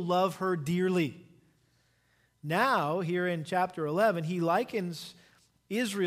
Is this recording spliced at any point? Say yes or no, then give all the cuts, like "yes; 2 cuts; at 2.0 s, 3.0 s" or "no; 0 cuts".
no; 0 cuts